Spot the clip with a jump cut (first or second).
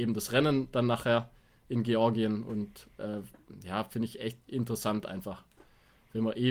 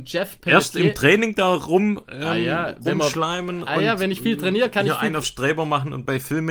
first